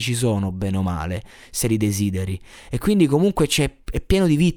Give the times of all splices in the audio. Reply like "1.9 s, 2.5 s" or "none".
none